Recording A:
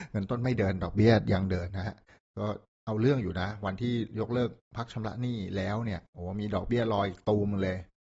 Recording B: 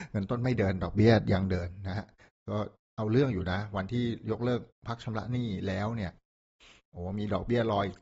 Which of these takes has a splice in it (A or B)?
A